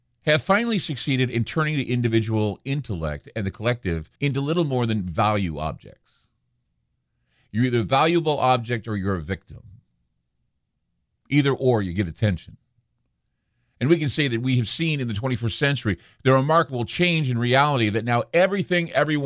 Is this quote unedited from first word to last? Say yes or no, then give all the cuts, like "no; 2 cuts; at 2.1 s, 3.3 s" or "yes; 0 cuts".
no; 1 cut; at 4.2 s